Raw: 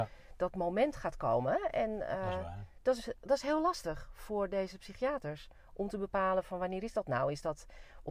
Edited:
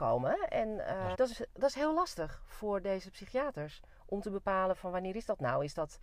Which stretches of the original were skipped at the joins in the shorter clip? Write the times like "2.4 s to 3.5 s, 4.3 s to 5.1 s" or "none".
2.4 s to 2.8 s